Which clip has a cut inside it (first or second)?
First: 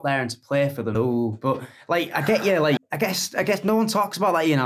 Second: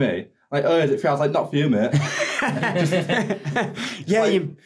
first